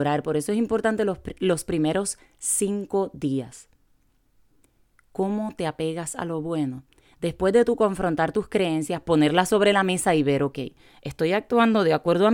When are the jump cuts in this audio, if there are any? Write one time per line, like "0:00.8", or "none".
none